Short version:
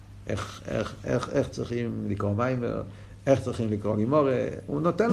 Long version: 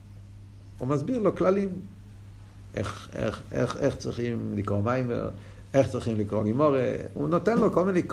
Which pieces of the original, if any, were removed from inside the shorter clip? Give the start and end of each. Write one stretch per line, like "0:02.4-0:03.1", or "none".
none

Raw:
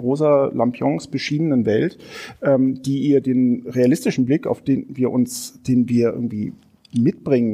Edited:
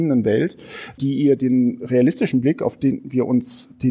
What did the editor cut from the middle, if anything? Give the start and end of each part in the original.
0:02.4-0:02.8

